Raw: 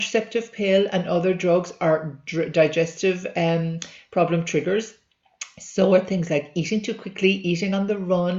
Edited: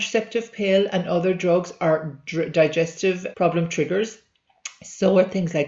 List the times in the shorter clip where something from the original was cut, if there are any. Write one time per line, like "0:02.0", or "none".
0:03.3